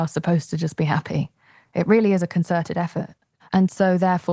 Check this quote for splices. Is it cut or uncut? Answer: cut